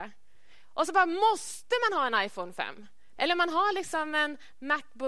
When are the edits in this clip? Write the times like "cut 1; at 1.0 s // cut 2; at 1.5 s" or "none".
cut 1; at 3.2 s